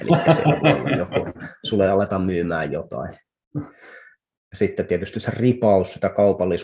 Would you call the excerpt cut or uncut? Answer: cut